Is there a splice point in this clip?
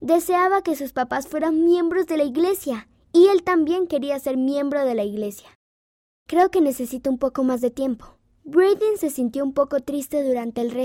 yes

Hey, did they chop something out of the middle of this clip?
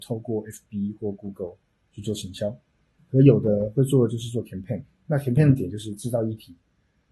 no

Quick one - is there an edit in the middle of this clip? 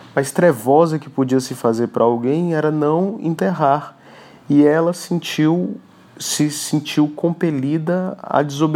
no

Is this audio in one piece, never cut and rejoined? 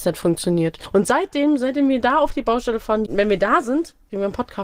no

